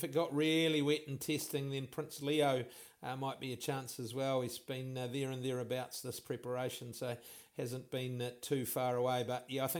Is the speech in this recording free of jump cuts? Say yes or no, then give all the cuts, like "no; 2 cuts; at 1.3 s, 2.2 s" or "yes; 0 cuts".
yes; 0 cuts